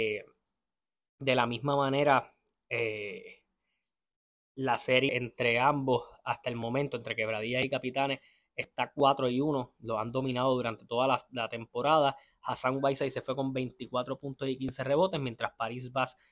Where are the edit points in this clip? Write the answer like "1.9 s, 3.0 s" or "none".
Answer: 5.1 s

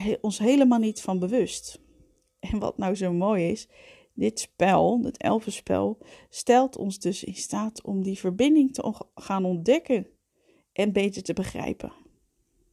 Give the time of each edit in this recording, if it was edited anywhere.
none

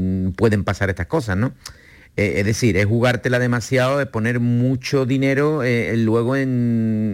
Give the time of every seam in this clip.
none

